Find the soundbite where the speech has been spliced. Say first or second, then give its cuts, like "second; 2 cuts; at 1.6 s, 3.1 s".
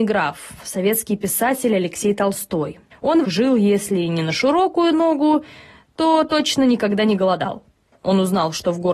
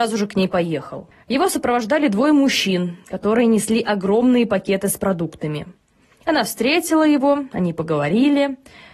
first; 1 cut; at 3.2 s